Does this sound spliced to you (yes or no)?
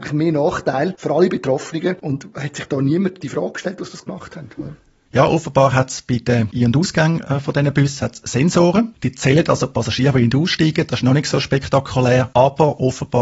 yes